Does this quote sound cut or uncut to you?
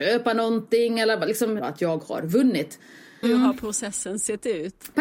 cut